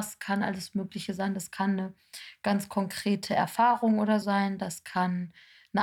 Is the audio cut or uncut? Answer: cut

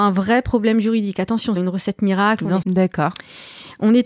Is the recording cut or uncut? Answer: cut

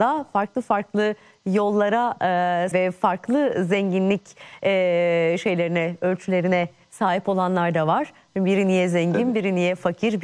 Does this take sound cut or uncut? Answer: cut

